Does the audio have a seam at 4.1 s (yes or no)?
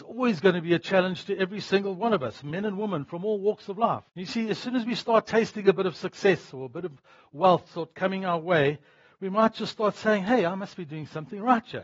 yes